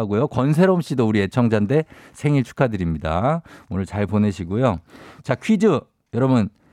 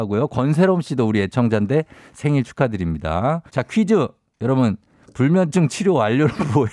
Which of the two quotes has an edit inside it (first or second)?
second